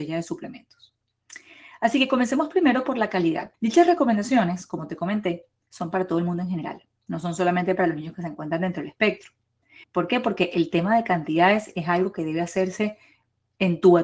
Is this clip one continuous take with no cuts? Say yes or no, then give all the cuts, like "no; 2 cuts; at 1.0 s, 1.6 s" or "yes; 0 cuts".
no; 2 cuts; at 3.5 s, 9.8 s